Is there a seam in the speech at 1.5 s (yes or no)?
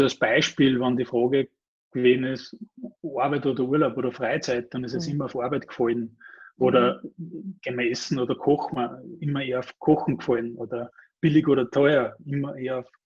no